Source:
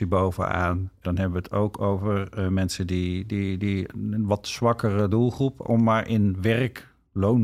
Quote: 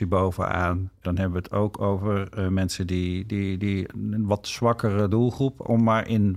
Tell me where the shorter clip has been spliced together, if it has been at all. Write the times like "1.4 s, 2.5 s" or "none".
none